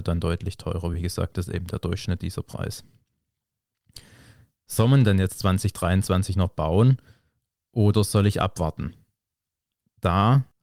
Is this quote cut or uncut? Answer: uncut